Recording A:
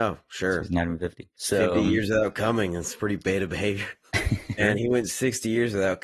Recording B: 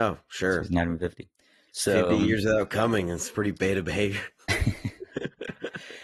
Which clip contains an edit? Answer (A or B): A